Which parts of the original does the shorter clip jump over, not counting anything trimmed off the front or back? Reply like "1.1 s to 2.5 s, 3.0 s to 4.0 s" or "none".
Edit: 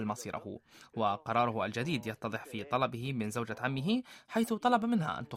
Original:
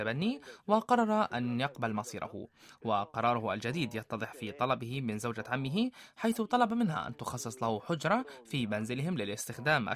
none